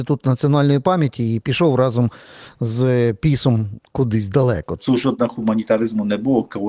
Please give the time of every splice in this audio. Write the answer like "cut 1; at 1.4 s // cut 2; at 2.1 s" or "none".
cut 1; at 4.8 s